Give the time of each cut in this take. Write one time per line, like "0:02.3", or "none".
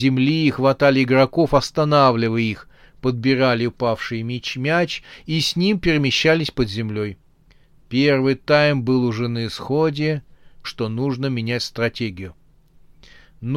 0:10.6